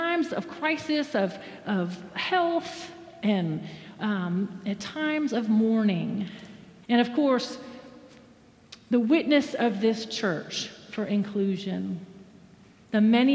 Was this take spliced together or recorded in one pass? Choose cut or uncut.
cut